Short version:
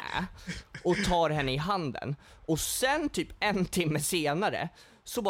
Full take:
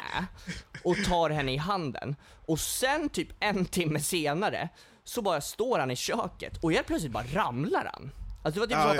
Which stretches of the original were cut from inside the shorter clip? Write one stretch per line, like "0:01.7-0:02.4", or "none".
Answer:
none